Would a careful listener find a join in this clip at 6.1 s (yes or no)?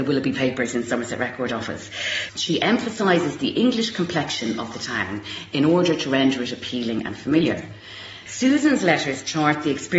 no